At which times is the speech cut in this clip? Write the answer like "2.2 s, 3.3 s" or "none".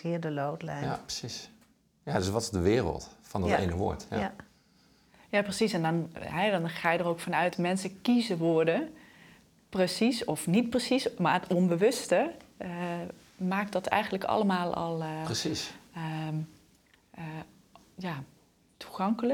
none